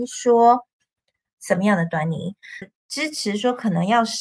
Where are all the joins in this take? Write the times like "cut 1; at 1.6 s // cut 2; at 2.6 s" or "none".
cut 1; at 1.4 s // cut 2; at 2.6 s